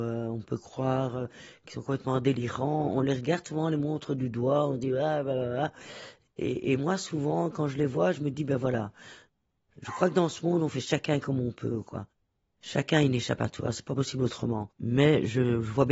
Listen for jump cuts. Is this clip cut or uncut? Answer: cut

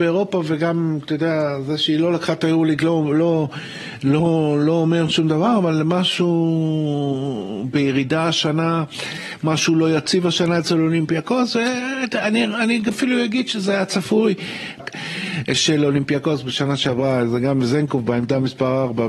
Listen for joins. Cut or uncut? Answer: cut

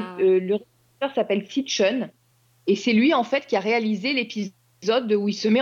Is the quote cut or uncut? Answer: uncut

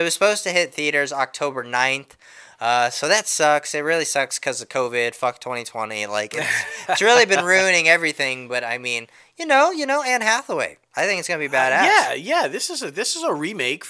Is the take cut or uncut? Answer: uncut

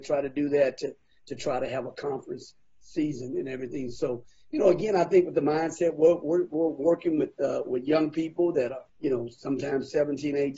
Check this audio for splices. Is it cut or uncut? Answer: cut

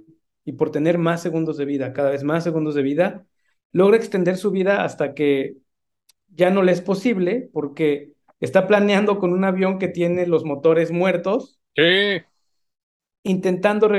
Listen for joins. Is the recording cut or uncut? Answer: uncut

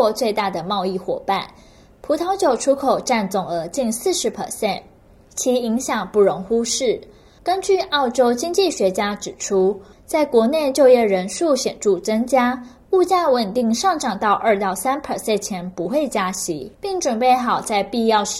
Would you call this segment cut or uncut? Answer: cut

